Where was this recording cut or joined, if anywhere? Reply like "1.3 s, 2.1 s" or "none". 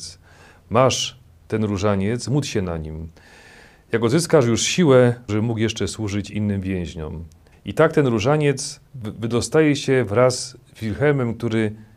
5.3 s, 7.5 s, 8.9 s